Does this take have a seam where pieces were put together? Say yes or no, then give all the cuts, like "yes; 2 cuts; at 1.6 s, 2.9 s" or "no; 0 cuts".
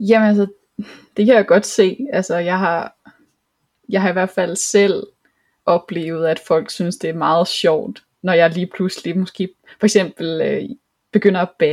yes; 1 cut; at 8.1 s